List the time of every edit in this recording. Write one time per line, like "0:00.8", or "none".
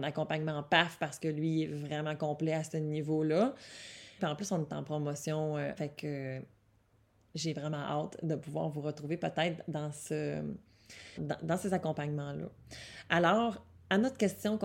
0:04.2
0:05.8
0:11.2